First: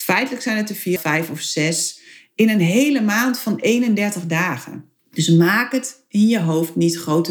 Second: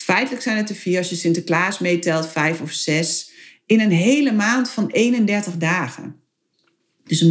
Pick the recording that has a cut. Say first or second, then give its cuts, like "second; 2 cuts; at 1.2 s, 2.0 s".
first; 2 cuts; at 1.0 s, 5.0 s